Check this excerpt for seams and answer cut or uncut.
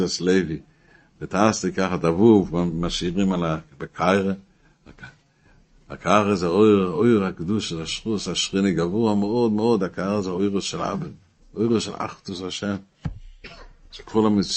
uncut